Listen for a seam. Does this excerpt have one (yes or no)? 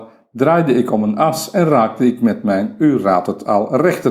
no